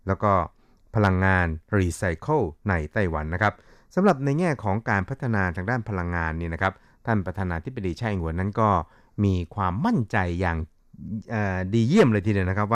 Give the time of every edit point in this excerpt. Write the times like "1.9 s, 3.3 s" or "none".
none